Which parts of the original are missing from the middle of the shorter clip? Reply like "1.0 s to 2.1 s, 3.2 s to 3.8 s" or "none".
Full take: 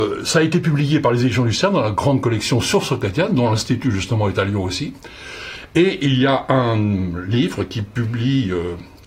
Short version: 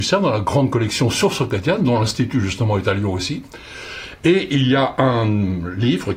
none